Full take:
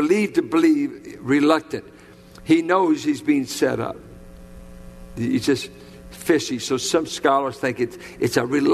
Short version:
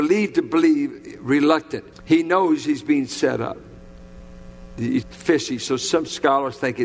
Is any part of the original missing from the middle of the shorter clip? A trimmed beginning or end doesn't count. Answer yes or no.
yes